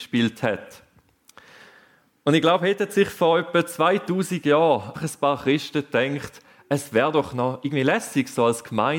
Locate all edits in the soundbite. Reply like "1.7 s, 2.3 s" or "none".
4.9 s

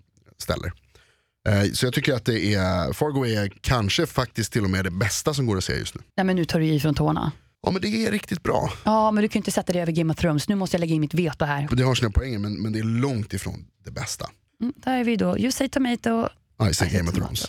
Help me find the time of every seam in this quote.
11.7 s

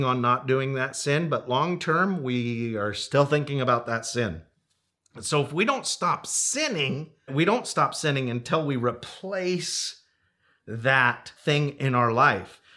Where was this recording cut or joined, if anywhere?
7.3 s, 11.4 s

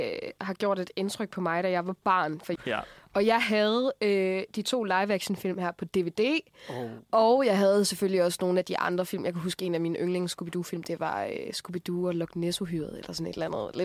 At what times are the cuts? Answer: 2.6 s

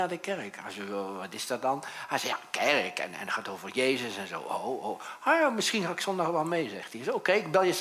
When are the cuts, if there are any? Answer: none

